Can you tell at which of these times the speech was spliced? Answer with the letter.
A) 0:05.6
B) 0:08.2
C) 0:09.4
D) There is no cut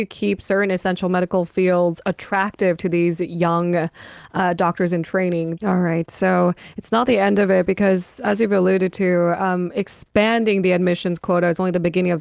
A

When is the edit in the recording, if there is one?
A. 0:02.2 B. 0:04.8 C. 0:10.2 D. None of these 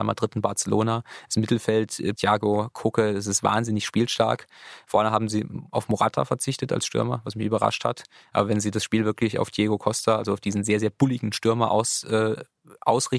A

